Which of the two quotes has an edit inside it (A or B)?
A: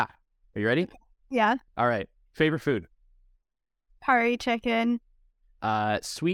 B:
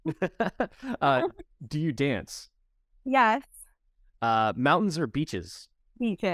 A